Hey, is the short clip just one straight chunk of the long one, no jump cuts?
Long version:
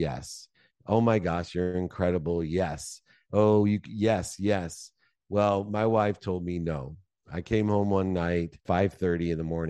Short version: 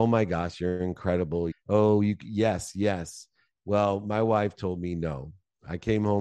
no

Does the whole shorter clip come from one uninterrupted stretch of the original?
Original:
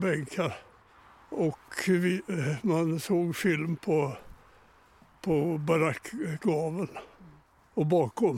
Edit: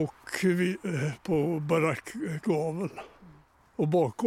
no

